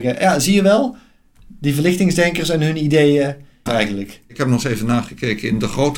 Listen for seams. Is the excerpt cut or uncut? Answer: cut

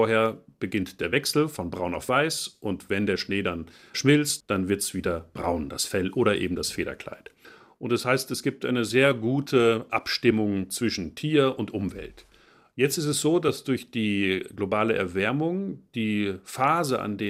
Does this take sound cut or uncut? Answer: cut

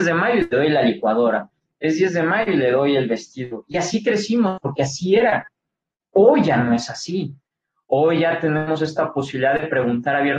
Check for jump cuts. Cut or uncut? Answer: uncut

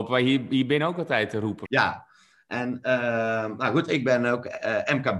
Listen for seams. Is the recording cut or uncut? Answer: cut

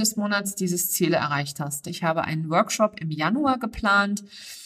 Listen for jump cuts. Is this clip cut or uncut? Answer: cut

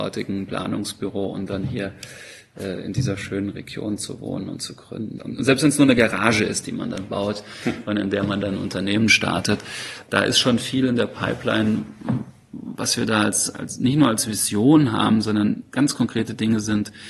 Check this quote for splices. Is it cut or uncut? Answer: cut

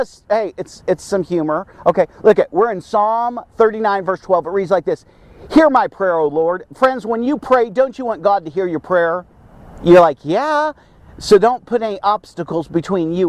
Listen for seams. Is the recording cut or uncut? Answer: uncut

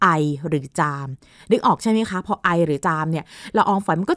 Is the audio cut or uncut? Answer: uncut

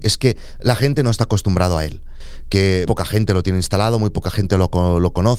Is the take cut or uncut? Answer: cut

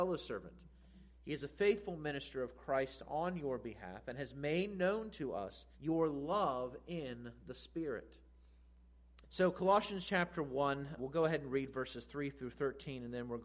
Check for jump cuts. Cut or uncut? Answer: cut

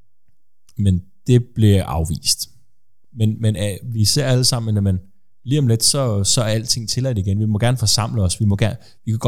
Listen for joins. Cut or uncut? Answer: cut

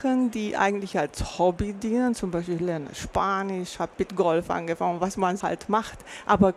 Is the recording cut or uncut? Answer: cut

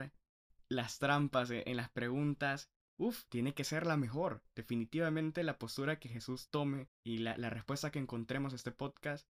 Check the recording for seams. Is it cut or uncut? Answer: cut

